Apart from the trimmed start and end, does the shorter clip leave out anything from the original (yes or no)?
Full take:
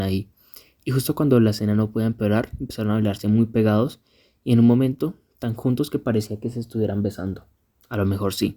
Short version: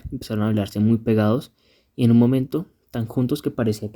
no